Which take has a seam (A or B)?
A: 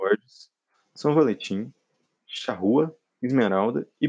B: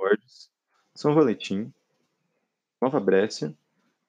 A